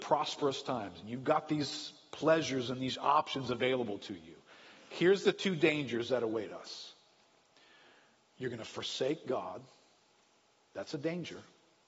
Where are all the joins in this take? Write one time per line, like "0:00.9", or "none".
none